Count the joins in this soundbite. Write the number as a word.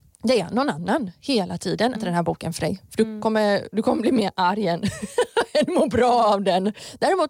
one